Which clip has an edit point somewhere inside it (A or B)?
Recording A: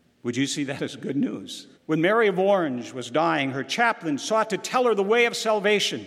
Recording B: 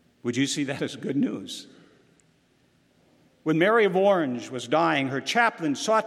A